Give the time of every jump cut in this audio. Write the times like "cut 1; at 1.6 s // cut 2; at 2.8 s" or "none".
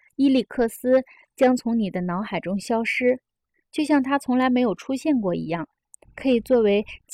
cut 1; at 6.0 s